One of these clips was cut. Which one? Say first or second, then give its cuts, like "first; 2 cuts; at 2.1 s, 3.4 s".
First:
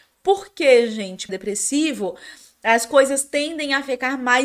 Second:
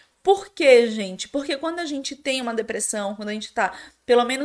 first; 1 cut; at 1.3 s